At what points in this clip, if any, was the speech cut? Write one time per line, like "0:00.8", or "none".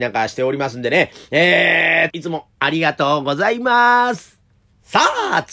0:02.1